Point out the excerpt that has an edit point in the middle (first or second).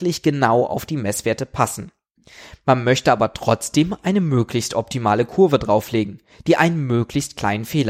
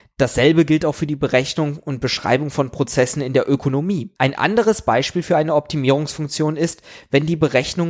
second